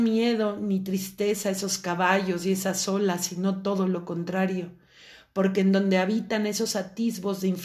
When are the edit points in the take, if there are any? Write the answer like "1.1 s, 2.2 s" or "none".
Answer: none